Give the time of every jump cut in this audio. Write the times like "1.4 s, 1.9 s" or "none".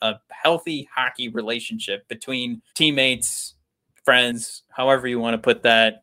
2.7 s